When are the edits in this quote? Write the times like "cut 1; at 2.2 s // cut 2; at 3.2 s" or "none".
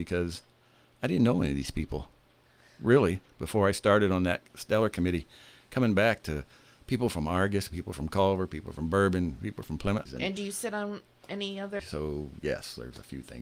cut 1; at 10.1 s // cut 2; at 11.8 s